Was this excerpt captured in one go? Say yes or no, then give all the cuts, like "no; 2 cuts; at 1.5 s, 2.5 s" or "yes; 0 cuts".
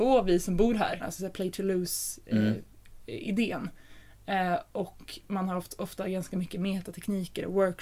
no; 1 cut; at 1.0 s